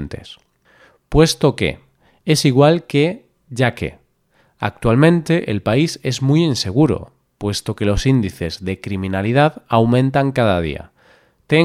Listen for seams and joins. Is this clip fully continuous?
yes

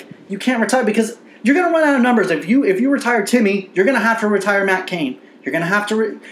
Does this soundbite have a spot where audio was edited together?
no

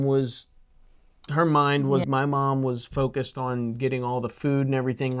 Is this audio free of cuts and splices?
no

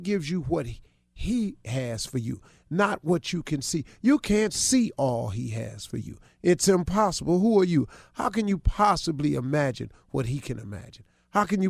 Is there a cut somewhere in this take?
no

